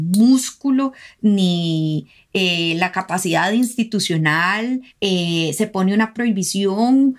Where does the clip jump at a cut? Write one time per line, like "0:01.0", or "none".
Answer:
0:04.9